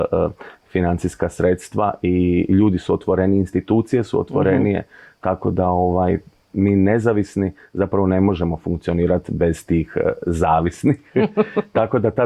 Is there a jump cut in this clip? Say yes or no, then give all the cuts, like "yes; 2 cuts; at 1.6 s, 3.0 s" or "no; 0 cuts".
no; 0 cuts